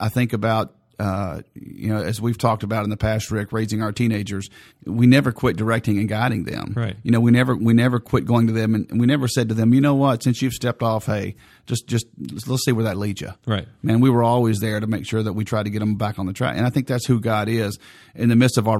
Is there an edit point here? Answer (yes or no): yes